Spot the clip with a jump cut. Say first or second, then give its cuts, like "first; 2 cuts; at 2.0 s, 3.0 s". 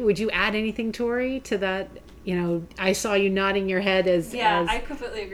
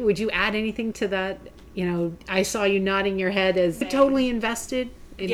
second; 2 cuts; at 0.9 s, 3.8 s